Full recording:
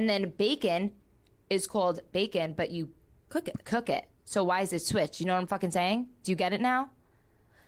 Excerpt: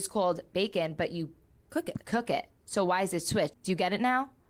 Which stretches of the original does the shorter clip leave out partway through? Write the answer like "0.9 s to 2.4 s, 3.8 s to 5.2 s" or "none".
5.1 s to 6.1 s